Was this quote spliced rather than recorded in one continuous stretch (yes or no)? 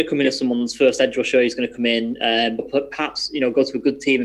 yes